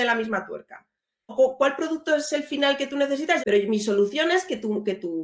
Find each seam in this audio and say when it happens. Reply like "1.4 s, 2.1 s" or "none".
1.3 s, 3.4 s